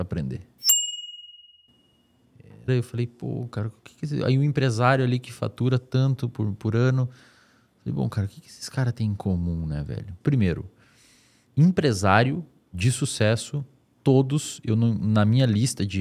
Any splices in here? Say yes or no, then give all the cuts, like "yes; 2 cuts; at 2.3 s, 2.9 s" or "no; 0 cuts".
yes; 2 cuts; at 2.7 s, 10.2 s